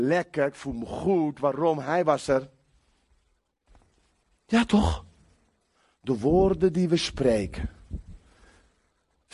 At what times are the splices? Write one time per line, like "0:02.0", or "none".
none